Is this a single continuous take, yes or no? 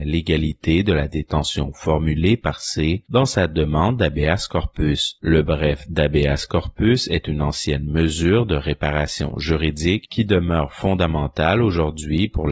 no